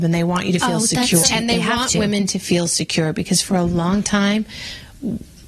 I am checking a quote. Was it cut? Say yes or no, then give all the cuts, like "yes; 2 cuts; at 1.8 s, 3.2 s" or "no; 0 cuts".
yes; 1 cut; at 1.2 s